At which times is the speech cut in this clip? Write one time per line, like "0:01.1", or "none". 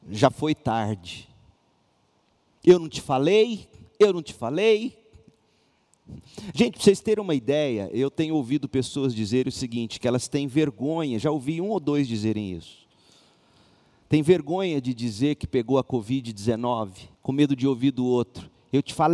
0:17.1